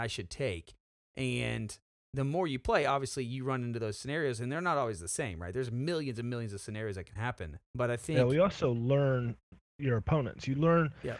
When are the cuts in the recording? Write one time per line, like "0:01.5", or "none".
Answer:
0:07.6

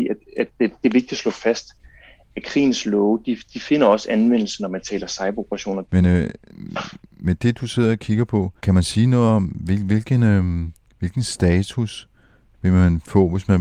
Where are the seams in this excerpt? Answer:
0:05.8
0:08.6

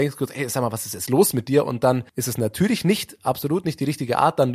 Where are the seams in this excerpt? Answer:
0:02.1

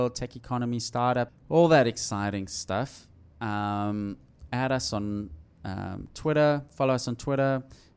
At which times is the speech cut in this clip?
0:01.3

